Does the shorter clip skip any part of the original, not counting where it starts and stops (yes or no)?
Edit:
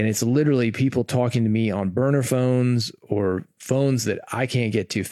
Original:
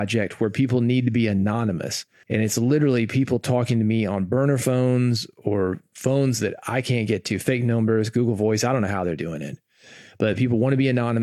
no